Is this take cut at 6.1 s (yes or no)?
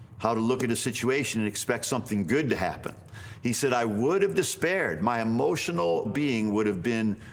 yes